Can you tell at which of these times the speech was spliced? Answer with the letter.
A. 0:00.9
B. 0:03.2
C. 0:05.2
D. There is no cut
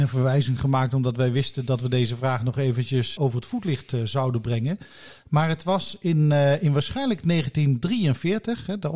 B